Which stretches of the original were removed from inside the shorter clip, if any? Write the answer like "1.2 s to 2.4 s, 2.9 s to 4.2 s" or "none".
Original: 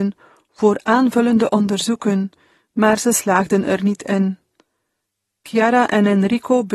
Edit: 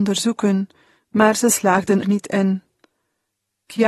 3.6 s to 3.8 s